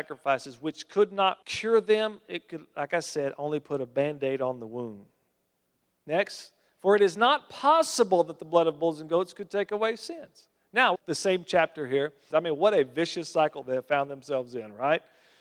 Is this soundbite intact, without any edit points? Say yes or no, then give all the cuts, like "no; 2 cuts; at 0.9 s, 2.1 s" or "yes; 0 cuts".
no; 3 cuts; at 1.4 s, 10.9 s, 12.3 s